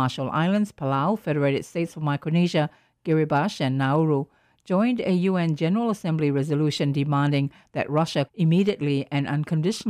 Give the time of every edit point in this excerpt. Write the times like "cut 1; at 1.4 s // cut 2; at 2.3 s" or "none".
cut 1; at 8.3 s